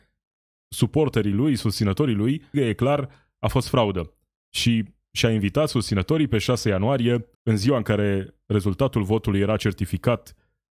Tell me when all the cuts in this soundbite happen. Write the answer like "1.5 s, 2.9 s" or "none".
2.5 s, 4.4 s, 7.3 s